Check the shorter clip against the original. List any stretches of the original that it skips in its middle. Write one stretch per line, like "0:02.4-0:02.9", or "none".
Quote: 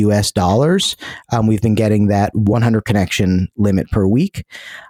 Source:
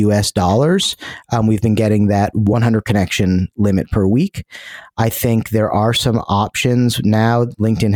none